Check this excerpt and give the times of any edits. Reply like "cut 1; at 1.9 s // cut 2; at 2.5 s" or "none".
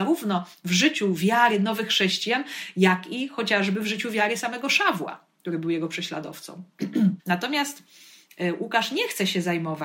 cut 1; at 7.2 s